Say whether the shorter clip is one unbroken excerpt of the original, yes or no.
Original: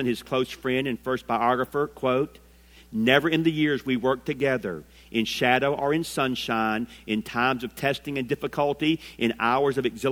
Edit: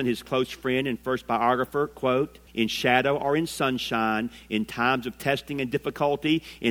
no